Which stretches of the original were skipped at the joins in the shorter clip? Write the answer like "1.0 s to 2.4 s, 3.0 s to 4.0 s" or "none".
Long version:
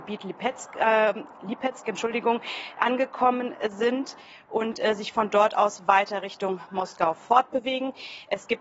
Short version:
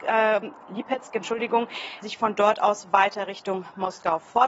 2.7 s to 5.0 s